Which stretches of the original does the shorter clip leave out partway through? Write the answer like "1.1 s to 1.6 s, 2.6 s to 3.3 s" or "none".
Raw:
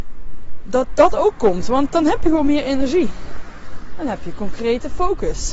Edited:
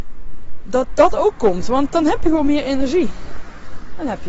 none